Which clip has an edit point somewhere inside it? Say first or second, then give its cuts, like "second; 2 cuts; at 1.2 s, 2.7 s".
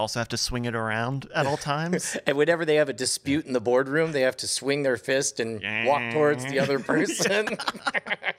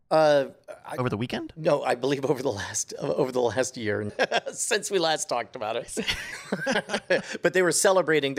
second; 1 cut; at 4.1 s